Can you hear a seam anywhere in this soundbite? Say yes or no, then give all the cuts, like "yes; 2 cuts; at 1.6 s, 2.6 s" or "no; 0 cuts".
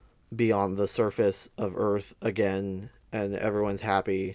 no; 0 cuts